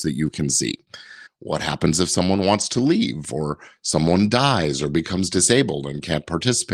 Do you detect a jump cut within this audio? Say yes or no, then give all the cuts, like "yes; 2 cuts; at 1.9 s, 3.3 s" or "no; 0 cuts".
yes; 1 cut; at 1.3 s